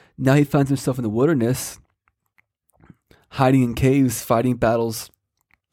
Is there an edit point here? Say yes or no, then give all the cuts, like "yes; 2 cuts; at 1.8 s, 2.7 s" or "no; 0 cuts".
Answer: no; 0 cuts